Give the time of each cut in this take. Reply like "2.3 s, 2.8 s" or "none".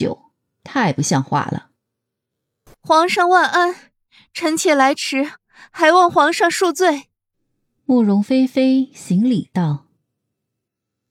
2.7 s